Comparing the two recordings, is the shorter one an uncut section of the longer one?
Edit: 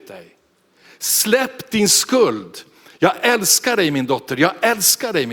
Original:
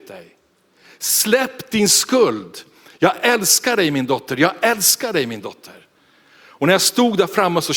yes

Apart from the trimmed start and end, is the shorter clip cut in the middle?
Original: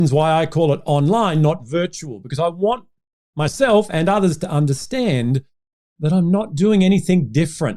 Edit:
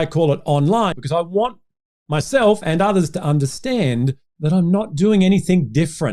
yes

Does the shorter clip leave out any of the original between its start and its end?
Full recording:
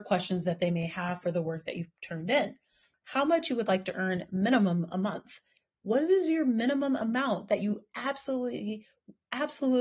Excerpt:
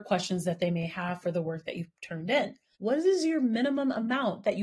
yes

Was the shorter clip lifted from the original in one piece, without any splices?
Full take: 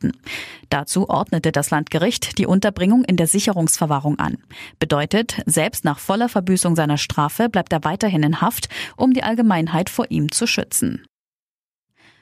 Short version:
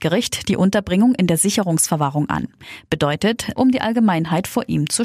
no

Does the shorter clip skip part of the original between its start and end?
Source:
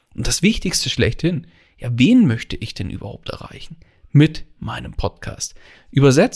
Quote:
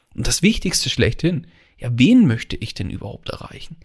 no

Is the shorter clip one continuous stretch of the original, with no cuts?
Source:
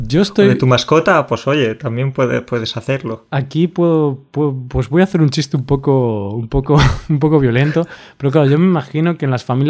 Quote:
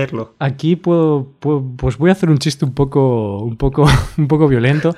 yes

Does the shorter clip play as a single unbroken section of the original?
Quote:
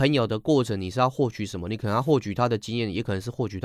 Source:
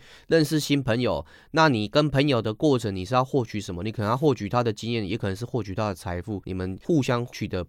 yes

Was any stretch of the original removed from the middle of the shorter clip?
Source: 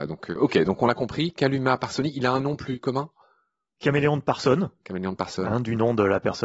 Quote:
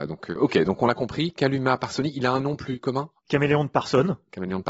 yes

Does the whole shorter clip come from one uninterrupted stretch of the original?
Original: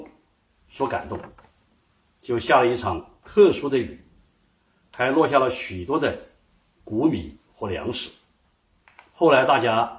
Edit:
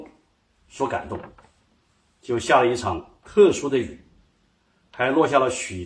yes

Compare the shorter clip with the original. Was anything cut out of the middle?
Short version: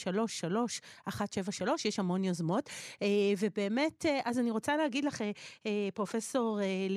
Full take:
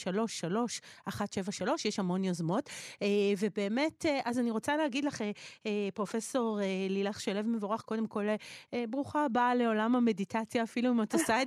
no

